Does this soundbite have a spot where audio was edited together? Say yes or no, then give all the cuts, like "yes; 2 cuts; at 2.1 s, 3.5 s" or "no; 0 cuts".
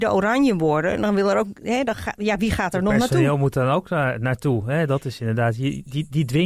no; 0 cuts